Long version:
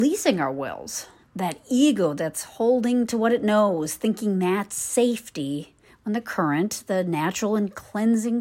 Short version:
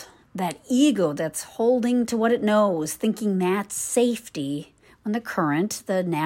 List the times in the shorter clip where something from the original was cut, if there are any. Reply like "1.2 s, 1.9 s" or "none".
none